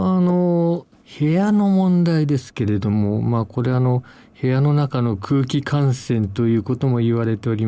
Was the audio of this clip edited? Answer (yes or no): no